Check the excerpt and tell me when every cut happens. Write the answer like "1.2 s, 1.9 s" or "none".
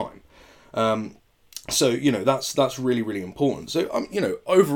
none